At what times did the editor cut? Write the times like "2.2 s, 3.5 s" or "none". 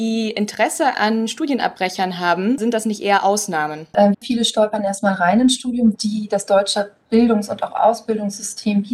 4.1 s, 5.9 s

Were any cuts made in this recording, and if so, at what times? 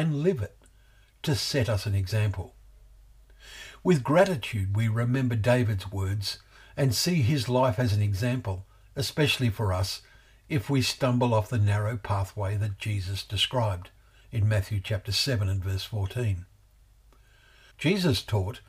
17.7 s

